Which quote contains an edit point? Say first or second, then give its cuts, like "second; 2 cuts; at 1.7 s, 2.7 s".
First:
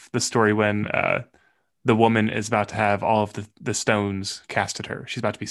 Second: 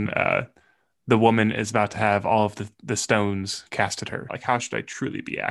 second; 1 cut; at 4.3 s